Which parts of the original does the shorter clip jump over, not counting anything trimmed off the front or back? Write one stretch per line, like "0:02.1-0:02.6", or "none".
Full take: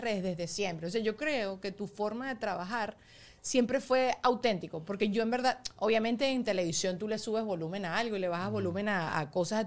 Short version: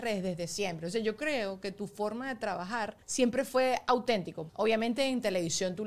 0:03.0-0:03.4
0:04.8-0:05.7

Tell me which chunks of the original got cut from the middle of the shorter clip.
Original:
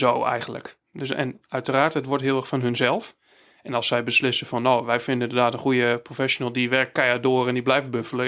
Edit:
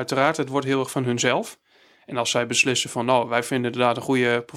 none

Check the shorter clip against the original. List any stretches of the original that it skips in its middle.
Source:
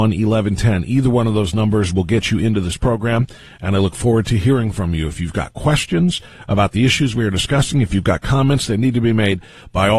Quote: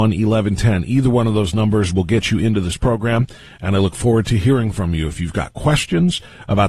none

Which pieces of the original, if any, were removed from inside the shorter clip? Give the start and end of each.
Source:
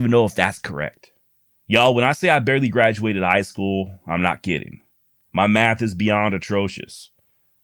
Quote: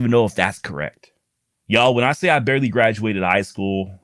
none

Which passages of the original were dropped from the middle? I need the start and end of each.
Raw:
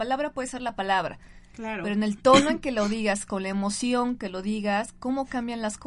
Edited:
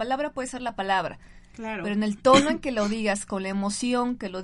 none

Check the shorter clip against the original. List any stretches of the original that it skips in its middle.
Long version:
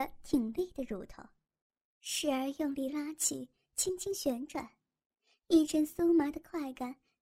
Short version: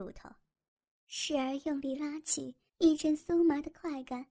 0:03.6-0:05.4

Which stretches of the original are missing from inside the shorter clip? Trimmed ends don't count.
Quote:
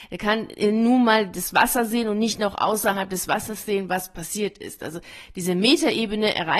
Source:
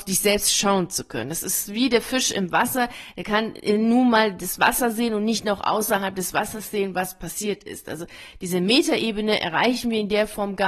none

